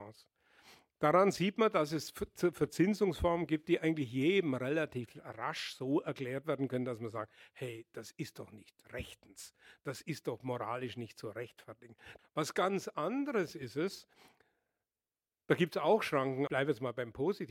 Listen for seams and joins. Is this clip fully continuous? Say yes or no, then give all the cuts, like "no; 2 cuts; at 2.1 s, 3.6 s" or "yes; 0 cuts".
no; 2 cuts; at 12.2 s, 16.5 s